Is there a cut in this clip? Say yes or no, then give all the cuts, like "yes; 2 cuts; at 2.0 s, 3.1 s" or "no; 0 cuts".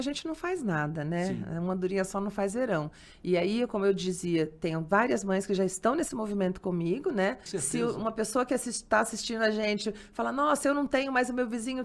yes; 1 cut; at 7.5 s